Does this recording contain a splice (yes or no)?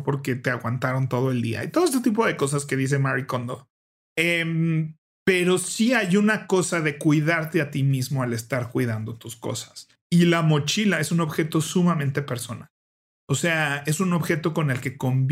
no